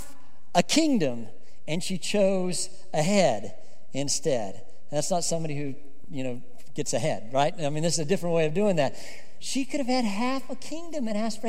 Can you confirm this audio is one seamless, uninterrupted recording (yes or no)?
yes